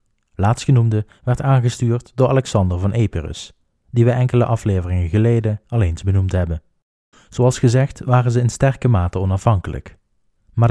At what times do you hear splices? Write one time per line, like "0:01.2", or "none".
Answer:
0:07.1